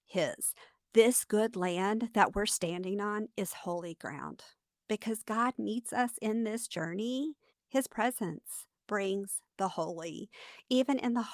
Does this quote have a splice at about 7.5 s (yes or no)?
yes